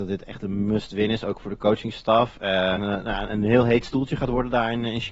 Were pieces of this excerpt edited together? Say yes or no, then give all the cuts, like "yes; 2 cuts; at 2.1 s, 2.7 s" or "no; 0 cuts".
yes; 1 cut; at 2.8 s